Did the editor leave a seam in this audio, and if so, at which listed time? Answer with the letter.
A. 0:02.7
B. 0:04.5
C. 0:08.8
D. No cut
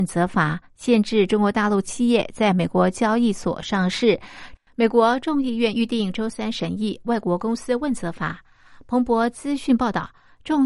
B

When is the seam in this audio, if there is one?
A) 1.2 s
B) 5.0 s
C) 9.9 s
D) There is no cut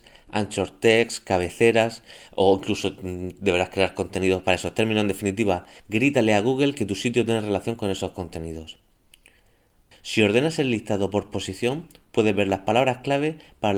C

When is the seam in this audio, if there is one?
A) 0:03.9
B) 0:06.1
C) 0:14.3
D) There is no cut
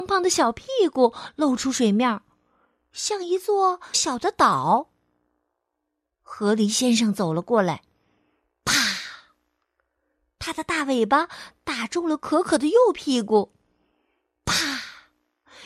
A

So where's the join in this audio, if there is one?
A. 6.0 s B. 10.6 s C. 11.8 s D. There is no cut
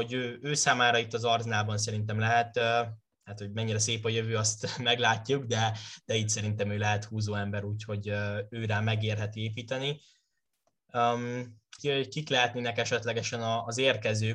C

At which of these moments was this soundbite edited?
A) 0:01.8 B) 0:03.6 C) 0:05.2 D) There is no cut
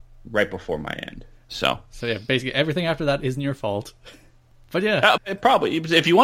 C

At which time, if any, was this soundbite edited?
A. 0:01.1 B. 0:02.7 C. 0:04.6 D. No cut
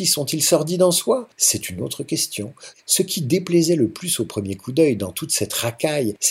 B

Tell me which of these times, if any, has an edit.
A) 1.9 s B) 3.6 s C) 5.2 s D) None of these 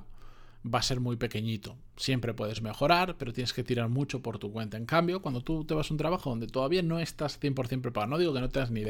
D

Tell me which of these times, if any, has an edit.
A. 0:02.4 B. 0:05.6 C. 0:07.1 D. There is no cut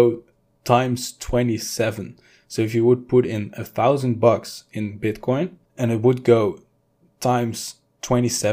B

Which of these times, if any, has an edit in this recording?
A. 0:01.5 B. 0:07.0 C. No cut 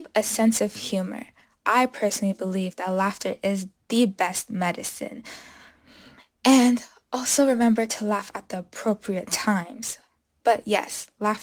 C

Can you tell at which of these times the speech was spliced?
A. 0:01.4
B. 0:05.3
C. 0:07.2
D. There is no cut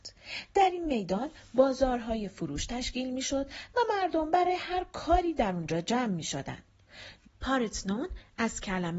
C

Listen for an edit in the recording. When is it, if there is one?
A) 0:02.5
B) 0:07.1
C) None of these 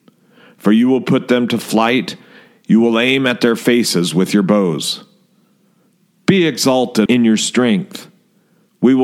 B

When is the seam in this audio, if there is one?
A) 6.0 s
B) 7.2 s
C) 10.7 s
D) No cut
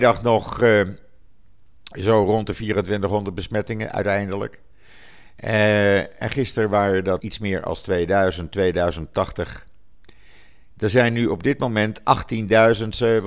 B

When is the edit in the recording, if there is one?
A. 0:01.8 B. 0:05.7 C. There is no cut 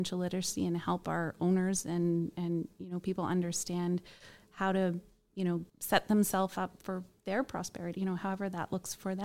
B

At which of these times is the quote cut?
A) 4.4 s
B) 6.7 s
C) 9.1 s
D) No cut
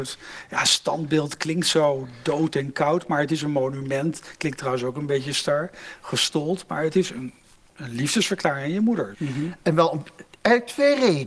C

